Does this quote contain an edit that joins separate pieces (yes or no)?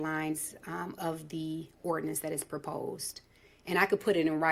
no